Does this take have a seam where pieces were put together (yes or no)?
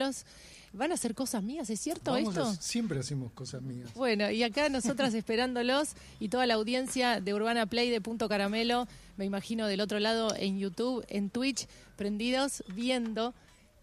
no